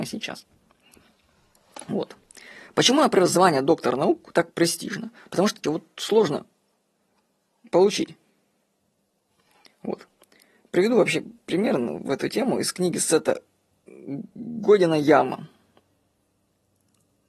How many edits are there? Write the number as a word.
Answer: one